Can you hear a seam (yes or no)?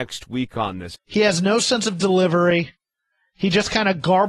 yes